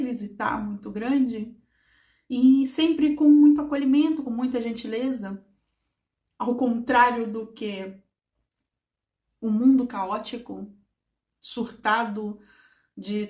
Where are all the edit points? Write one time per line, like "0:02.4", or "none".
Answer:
0:04.2